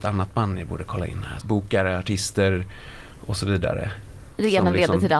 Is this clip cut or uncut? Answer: cut